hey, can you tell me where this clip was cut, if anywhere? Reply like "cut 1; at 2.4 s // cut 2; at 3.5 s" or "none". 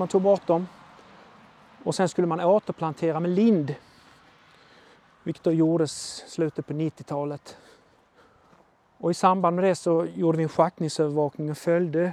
none